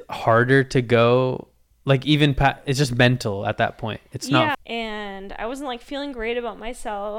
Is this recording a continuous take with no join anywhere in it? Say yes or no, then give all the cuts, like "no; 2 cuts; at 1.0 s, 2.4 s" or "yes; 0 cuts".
no; 1 cut; at 4.5 s